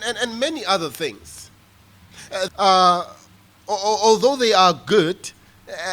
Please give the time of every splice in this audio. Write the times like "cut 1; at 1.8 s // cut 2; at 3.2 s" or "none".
cut 1; at 2.5 s

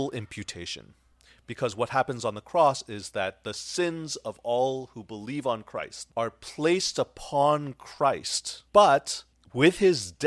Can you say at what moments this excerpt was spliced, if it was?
cut 1; at 6.1 s // cut 2; at 8.7 s

